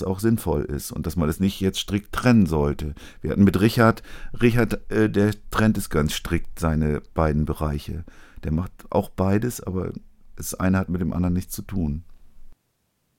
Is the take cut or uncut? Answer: uncut